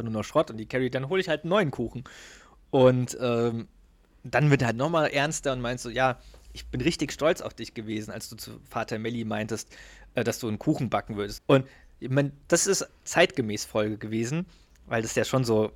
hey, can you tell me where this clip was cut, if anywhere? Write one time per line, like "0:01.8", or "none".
0:11.4
0:13.0